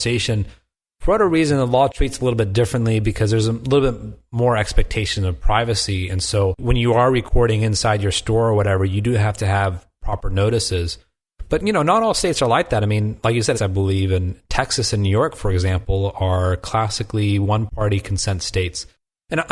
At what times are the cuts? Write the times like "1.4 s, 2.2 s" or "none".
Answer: 13.5 s